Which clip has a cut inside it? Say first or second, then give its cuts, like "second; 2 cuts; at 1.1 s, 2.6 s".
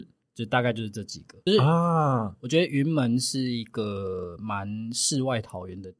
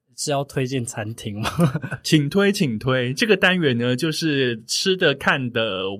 first; 1 cut; at 1.5 s